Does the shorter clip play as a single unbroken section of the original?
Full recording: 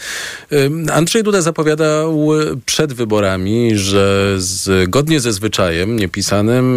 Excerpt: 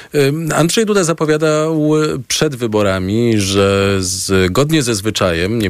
yes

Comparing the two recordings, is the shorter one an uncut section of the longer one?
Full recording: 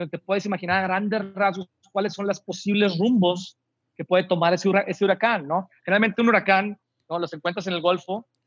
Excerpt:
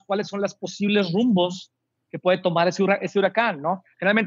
yes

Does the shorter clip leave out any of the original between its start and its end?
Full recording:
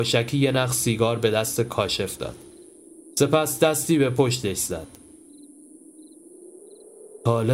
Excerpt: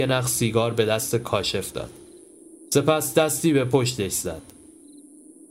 no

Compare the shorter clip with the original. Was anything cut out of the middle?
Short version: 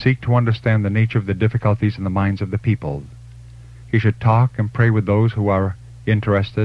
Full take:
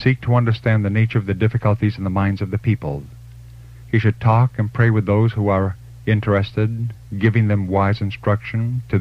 no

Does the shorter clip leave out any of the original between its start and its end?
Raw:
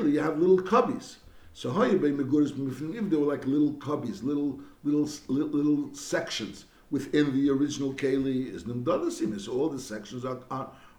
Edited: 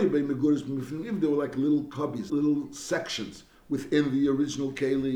yes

